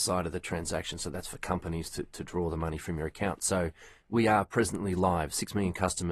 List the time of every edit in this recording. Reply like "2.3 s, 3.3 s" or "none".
none